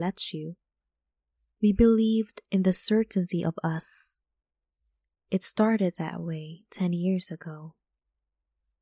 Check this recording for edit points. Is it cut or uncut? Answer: uncut